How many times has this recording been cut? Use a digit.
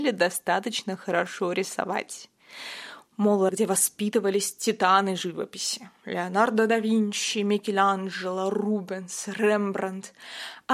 1